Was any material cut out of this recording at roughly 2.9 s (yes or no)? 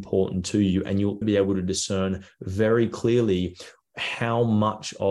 no